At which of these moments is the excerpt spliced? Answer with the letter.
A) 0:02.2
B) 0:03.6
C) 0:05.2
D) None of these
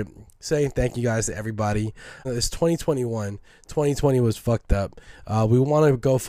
A